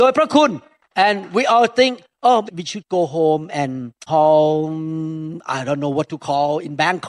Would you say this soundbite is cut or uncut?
cut